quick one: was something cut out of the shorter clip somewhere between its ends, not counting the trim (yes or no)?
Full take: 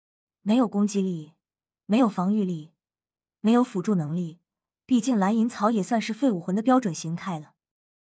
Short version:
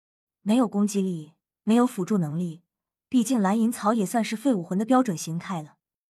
yes